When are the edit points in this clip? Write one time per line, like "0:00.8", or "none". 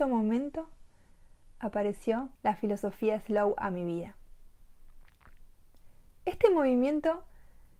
0:02.4
0:06.1